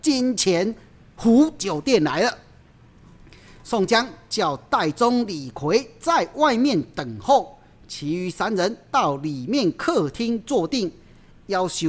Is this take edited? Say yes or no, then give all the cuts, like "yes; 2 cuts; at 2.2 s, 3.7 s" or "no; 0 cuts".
no; 0 cuts